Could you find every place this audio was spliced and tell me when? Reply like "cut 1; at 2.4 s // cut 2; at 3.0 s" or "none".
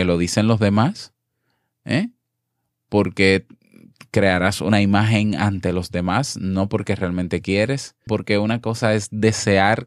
cut 1; at 8.1 s